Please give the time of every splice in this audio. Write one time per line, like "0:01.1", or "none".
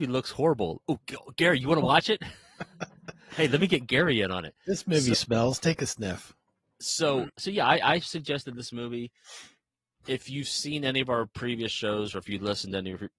0:07.3